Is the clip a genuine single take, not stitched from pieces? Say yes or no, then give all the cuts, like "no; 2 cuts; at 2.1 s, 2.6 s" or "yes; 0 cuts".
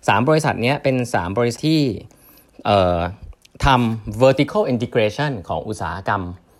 no; 1 cut; at 1.6 s